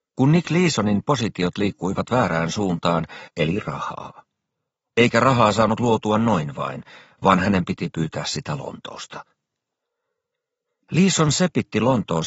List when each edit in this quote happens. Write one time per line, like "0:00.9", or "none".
0:03.3